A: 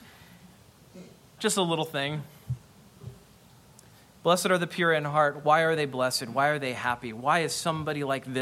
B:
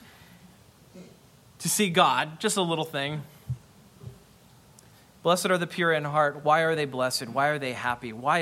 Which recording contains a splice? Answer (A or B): A